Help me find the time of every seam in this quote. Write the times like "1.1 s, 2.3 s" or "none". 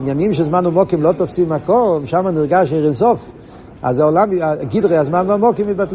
3.7 s

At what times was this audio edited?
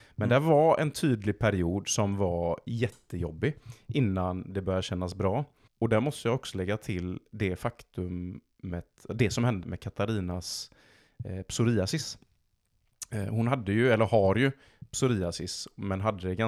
5.7 s, 9.6 s

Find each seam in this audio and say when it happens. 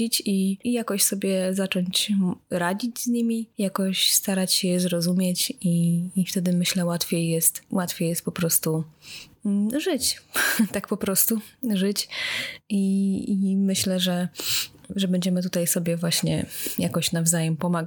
none

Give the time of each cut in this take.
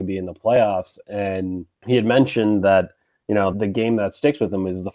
1.7 s, 3.5 s

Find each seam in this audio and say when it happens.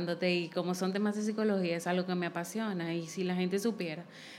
none

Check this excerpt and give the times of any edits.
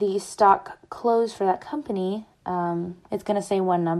3.0 s

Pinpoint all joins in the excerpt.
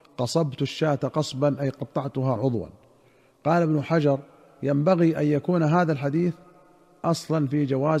2.4 s

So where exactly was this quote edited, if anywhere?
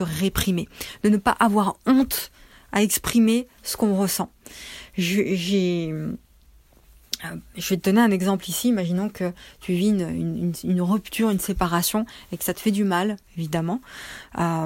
13.3 s

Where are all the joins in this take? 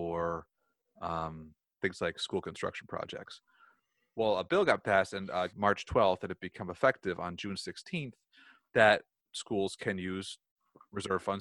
5.5 s

